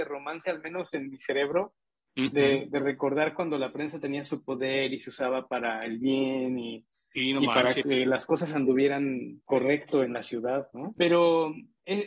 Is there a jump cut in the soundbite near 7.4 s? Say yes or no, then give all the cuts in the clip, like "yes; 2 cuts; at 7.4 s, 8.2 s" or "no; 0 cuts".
no; 1 cut; at 11.0 s